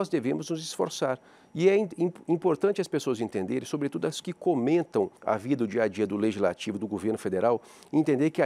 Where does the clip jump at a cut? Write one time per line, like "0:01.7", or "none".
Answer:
0:05.2
0:06.8